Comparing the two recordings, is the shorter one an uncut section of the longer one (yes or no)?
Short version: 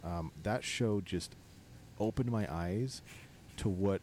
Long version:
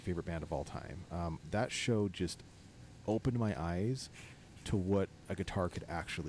yes